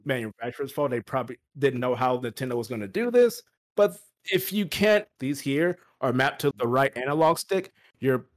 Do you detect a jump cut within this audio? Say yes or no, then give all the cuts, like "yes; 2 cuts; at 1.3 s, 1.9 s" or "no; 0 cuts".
yes; 2 cuts; at 5.2 s, 6.5 s